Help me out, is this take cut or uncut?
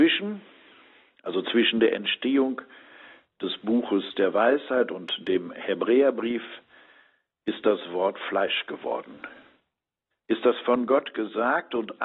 cut